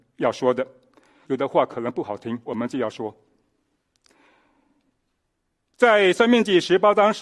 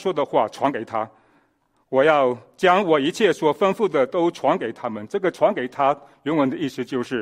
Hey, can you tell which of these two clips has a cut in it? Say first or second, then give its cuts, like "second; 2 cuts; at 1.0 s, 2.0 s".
first; 2 cuts; at 1.2 s, 2.5 s